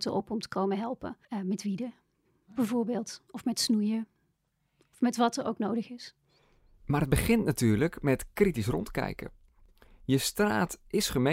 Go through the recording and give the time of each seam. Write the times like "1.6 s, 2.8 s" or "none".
1.2 s